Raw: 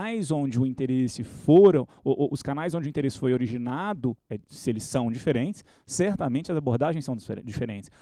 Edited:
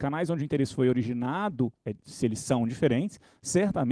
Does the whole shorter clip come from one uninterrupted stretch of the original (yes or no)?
yes